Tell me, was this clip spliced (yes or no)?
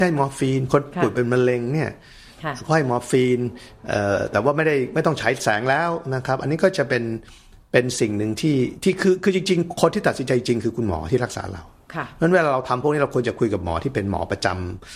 no